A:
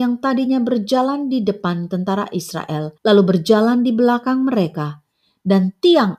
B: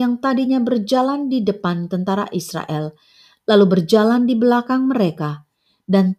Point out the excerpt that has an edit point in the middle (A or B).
A